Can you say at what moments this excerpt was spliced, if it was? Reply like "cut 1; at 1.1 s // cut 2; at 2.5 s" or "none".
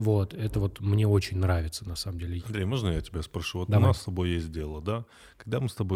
cut 1; at 2.4 s